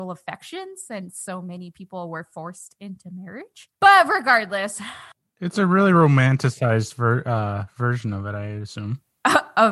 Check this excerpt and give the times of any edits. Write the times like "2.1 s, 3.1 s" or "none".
none